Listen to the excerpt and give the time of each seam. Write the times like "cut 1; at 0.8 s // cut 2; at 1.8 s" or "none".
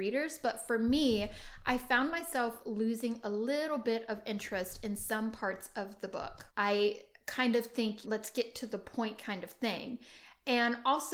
cut 1; at 6.5 s // cut 2; at 8.0 s